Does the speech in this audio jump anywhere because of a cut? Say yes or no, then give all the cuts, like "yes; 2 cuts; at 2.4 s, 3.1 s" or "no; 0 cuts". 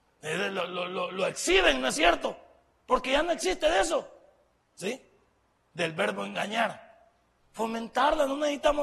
yes; 2 cuts; at 4.6 s, 7.4 s